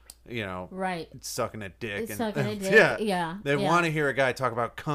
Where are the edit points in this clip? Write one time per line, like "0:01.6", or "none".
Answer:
none

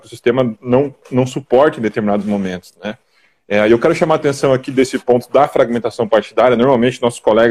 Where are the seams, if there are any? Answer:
none

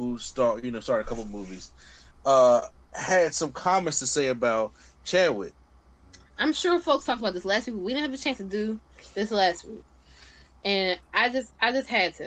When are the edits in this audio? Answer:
0:06.4

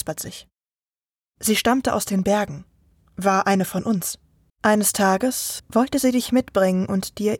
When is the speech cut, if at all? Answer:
0:04.5
0:05.6

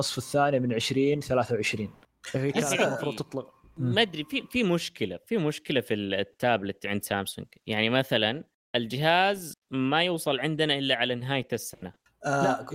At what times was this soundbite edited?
none

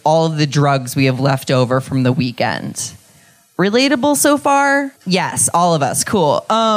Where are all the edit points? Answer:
0:05.0

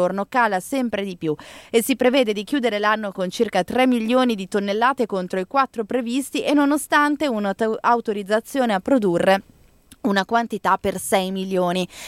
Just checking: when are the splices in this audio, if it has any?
none

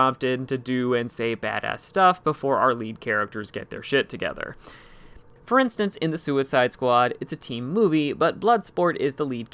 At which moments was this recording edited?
0:05.4

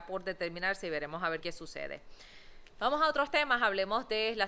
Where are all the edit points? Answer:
0:01.4

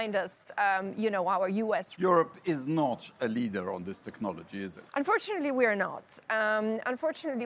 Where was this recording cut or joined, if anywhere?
0:01.9
0:04.9

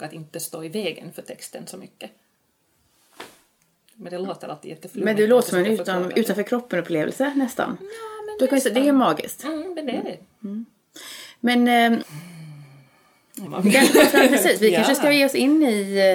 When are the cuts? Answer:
0:12.0
0:13.5

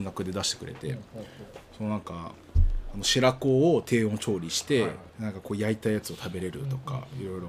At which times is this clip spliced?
0:05.1

